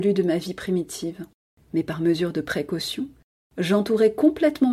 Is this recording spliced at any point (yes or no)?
yes